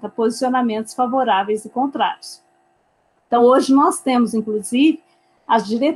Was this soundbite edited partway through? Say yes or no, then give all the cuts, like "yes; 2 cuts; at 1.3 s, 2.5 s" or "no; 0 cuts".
no; 0 cuts